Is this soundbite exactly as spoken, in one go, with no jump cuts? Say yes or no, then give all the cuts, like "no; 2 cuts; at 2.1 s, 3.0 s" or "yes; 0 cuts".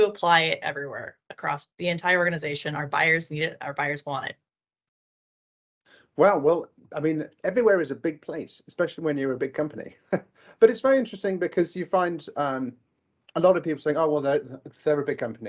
no; 1 cut; at 1.7 s